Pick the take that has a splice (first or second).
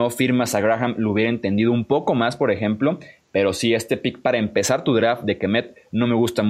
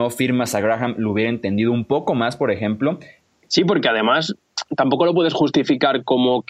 second